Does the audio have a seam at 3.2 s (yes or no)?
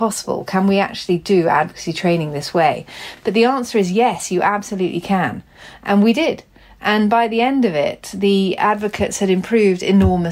no